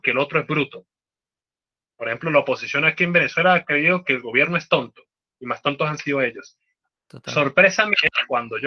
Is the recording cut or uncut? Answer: uncut